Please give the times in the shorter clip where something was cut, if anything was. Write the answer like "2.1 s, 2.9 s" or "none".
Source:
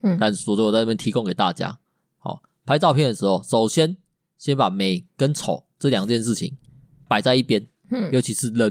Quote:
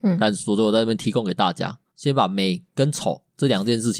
1.9 s